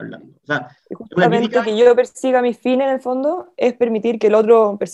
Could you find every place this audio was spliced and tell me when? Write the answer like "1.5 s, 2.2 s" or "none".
none